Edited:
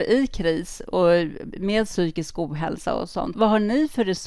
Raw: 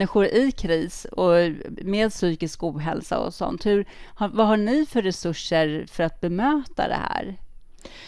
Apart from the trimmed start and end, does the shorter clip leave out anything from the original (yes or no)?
yes